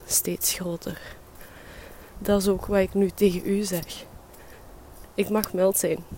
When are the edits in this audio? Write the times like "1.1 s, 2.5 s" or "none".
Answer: 2.1 s, 5.1 s